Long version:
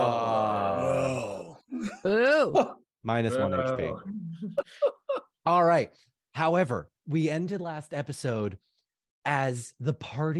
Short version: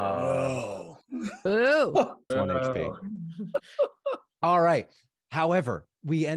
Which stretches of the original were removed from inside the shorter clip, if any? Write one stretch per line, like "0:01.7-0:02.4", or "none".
0:02.9-0:03.3